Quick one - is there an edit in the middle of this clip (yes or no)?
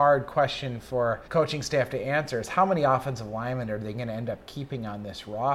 yes